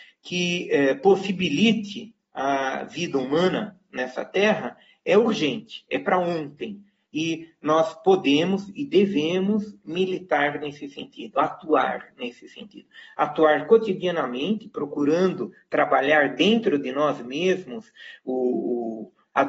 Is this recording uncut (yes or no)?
yes